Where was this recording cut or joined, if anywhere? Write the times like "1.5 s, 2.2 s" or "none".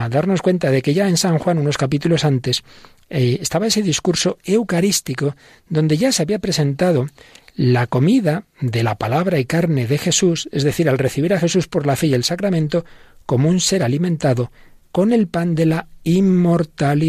none